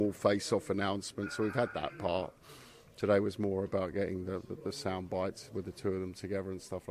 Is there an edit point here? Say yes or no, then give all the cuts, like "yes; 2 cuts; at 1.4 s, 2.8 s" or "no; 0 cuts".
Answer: no; 0 cuts